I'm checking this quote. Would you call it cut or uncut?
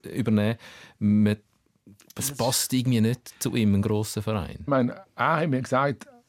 cut